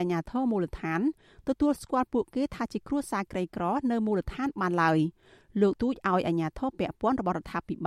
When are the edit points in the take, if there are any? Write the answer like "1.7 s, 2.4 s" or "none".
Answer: 5.8 s

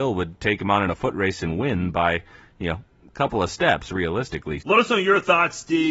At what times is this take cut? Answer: 4.6 s

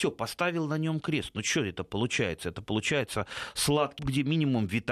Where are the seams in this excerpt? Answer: 4.0 s

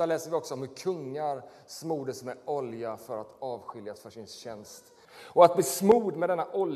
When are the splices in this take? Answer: 5.0 s

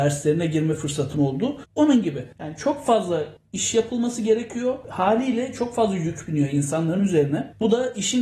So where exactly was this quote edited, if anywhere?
1.7 s

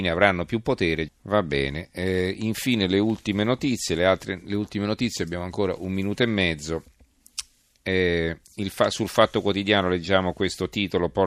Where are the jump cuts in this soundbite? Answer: 1.1 s

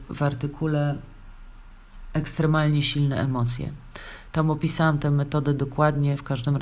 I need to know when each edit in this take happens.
none

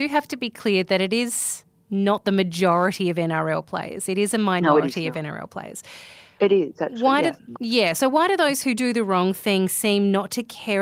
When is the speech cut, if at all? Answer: 7.5 s, 8.8 s

